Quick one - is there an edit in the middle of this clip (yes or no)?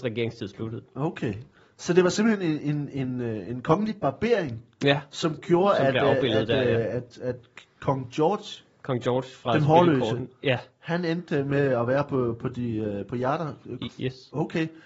yes